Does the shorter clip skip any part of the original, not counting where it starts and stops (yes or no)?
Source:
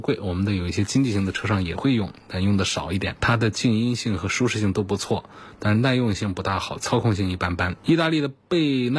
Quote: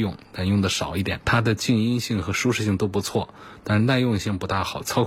no